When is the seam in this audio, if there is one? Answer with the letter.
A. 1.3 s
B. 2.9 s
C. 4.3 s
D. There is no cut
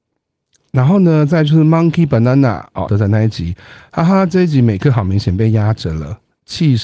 B